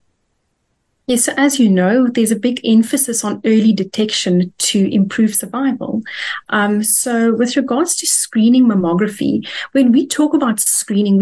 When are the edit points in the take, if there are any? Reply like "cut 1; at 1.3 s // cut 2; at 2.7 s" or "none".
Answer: none